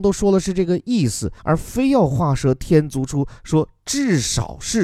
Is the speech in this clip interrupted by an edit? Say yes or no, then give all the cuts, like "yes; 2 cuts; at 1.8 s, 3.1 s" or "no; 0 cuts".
yes; 1 cut; at 1.4 s